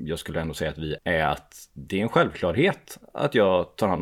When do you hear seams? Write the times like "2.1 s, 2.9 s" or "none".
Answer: 1.0 s